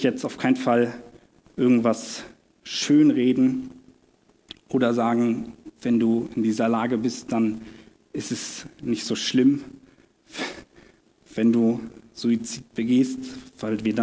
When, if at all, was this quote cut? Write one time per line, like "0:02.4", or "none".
none